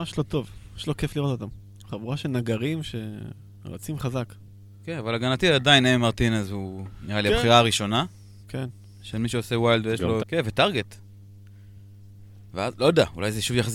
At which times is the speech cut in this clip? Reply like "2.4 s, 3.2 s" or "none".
10.2 s, 12.5 s